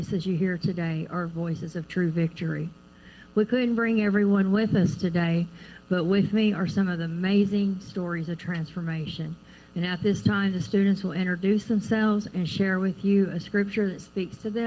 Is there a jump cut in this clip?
no; 0 cuts

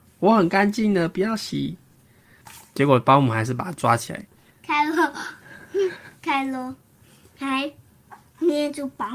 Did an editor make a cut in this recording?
yes; 1 cut; at 4.5 s

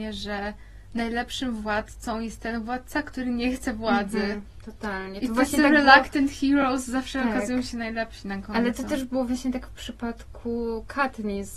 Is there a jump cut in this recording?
no; 0 cuts

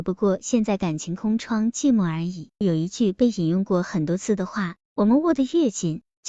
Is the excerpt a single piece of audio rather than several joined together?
no; 2 cuts; at 2.6 s, 4.9 s

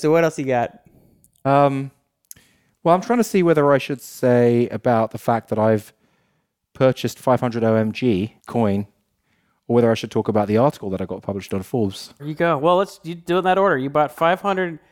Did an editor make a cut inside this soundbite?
yes; 2 cuts; at 8.4 s, 12.2 s

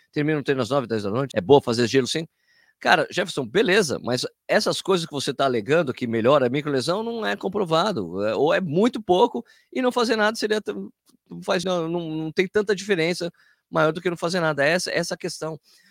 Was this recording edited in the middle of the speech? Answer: yes; 2 cuts; at 1.3 s, 11.6 s

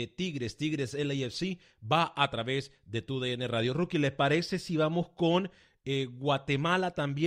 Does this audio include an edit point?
no; 0 cuts

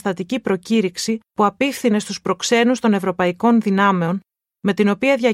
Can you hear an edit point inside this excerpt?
yes; 1 cut; at 1.3 s

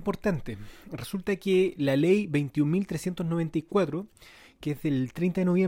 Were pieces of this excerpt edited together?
no; 0 cuts

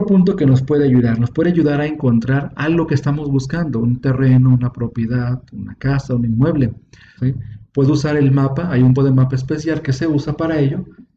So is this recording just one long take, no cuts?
no; 2 cuts; at 7.2 s, 8.9 s

